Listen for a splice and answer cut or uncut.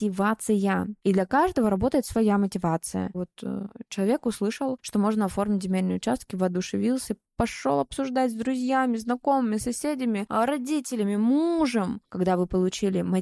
cut